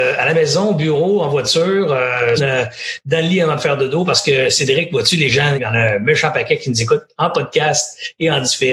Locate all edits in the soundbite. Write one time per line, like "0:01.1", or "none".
0:02.4
0:05.6